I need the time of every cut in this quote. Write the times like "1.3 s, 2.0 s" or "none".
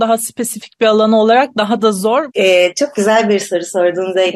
2.3 s